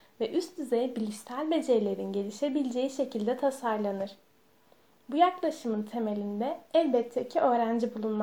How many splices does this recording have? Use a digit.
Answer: 0